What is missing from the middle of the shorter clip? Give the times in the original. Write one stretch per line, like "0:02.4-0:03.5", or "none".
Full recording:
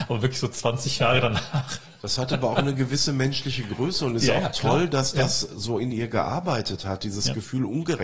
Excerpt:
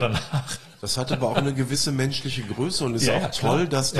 none